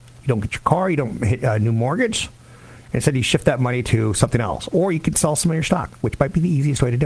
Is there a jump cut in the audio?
no; 0 cuts

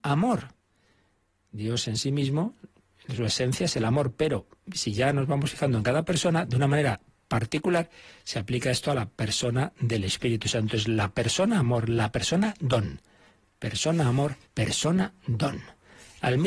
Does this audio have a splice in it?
yes; 1 cut; at 14.5 s

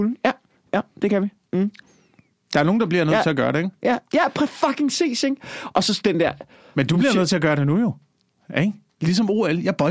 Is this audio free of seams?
yes; 0 cuts

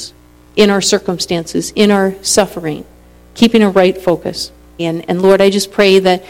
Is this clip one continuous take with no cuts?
no; 1 cut; at 4.8 s

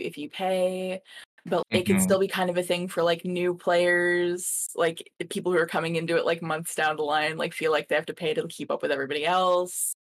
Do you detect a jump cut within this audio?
yes; 1 cut; at 1.6 s

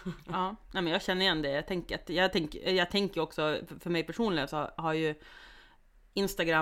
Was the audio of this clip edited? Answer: no; 0 cuts

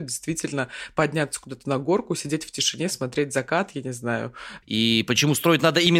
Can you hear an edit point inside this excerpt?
yes; 1 cut; at 4.6 s

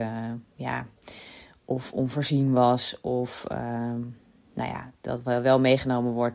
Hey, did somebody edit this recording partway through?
no; 0 cuts

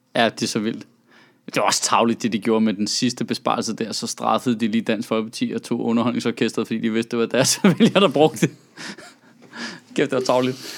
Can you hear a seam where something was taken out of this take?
no; 0 cuts

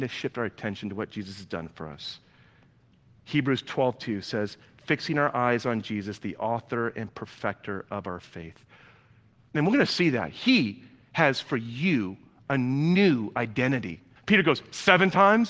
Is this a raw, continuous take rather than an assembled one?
no; 2 cuts; at 9.5 s, 14.2 s

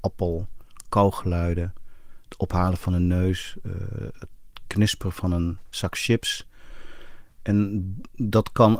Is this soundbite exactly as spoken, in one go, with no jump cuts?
yes; 0 cuts

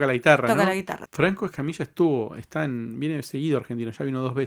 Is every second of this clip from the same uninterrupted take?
no; 1 cut; at 1.1 s

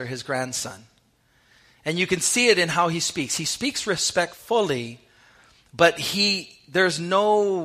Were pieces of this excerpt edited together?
no; 0 cuts

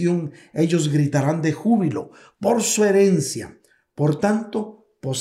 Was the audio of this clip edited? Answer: no; 0 cuts

